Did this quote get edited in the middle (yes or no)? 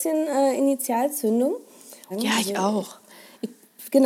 yes